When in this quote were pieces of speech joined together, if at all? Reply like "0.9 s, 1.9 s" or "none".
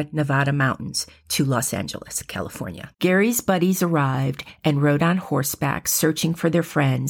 2.9 s